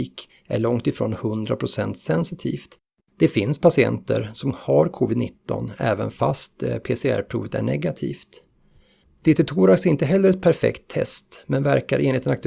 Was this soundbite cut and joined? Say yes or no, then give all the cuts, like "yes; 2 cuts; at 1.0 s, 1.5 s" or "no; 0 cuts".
yes; 1 cut; at 3.0 s